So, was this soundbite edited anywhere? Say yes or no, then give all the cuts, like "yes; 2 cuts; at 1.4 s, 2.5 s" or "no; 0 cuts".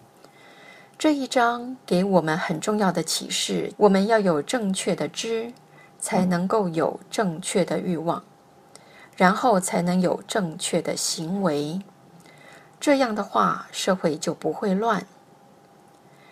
yes; 1 cut; at 3.7 s